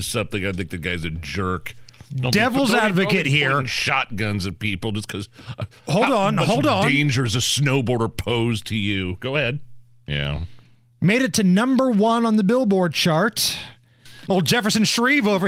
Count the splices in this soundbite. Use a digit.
2